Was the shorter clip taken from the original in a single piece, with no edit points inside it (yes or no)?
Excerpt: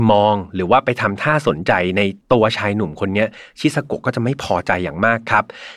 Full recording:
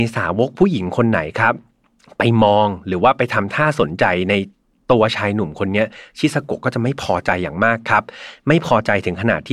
no